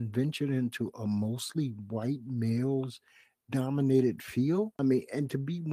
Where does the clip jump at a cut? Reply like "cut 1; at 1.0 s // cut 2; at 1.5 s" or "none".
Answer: cut 1; at 4.7 s